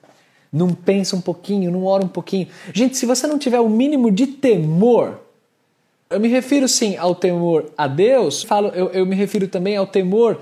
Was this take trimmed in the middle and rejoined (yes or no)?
yes